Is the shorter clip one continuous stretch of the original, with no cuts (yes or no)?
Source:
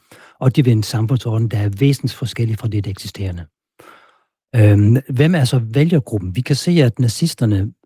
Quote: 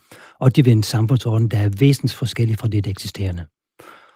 yes